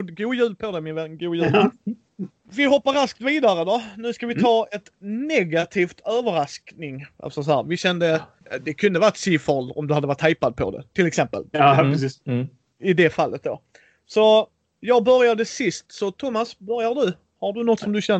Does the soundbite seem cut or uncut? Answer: uncut